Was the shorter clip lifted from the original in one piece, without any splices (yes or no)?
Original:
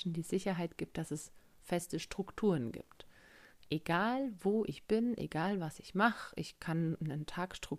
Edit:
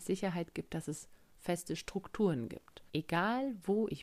no